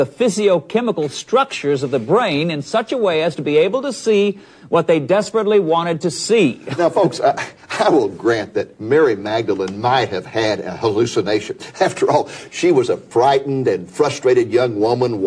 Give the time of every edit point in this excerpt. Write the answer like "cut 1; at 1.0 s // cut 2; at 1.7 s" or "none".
none